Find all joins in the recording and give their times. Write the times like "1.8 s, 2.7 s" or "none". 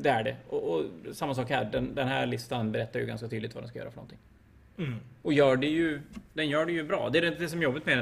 none